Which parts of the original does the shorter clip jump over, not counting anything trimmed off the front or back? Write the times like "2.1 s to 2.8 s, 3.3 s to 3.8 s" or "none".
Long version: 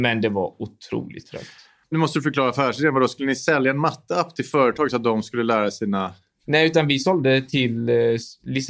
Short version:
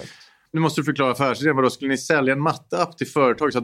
none